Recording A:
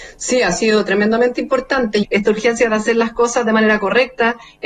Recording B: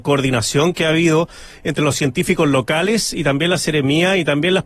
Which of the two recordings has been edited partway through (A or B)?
A